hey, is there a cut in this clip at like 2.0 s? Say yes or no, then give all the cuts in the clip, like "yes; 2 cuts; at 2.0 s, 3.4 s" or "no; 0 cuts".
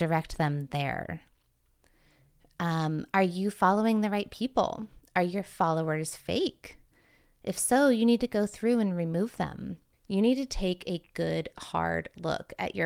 no; 1 cut; at 9.9 s